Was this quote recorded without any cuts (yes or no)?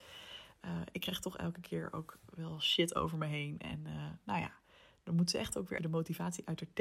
no